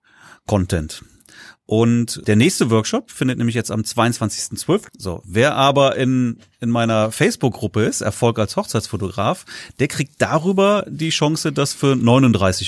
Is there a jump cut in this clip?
yes; 2 cuts; at 2.2 s, 4.9 s

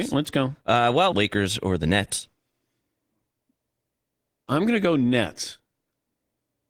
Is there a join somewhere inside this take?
yes; 2 cuts; at 1.1 s, 4.3 s

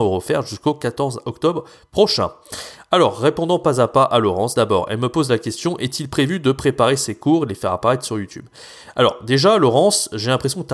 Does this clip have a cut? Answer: no; 0 cuts

